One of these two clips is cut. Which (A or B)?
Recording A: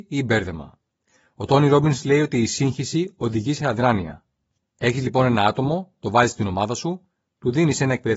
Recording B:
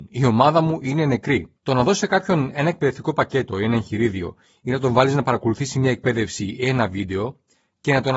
B